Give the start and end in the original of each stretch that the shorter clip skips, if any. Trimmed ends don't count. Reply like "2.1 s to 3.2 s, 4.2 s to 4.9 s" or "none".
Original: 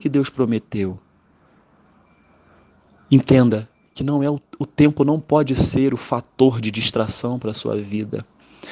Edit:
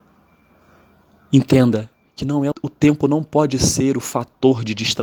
4.3 s to 4.5 s